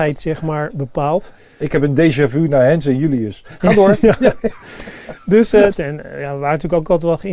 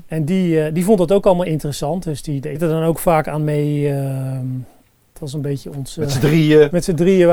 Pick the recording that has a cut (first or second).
first